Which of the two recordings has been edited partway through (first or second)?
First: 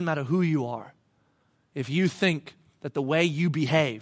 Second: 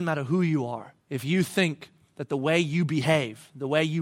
second